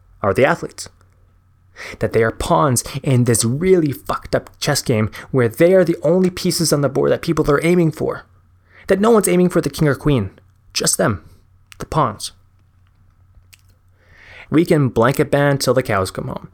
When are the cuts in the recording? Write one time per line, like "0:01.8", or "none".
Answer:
0:14.5